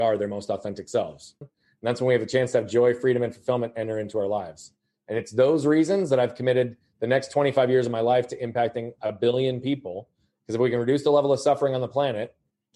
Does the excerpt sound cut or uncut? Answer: cut